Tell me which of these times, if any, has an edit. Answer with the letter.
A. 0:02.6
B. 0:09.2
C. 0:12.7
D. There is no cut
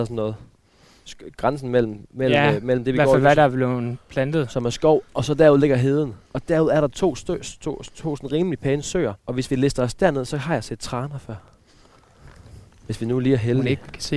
B